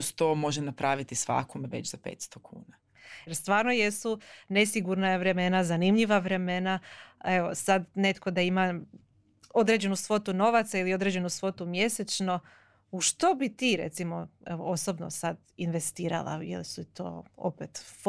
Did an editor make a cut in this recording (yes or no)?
yes